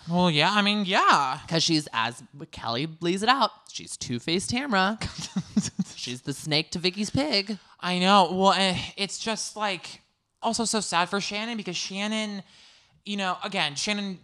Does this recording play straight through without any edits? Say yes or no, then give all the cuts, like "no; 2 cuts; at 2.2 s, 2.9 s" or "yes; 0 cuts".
no; 1 cut; at 10.4 s